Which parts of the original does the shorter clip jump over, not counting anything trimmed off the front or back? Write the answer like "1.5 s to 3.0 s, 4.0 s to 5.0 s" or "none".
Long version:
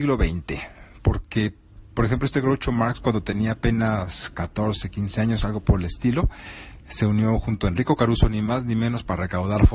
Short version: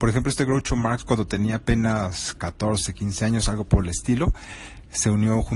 none